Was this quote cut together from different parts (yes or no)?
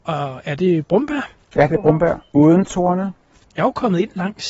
yes